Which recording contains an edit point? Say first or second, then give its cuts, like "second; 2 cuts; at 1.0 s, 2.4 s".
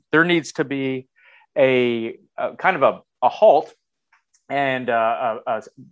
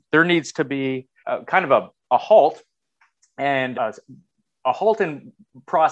second; 2 cuts; at 1.2 s, 3.7 s